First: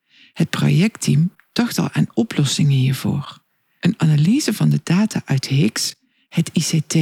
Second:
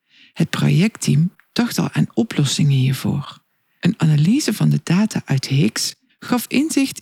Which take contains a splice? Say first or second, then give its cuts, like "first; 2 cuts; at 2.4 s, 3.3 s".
second; 1 cut; at 6.1 s